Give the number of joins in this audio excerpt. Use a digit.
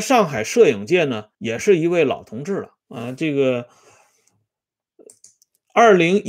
2